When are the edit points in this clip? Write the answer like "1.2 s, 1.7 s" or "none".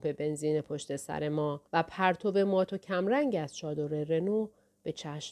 1.7 s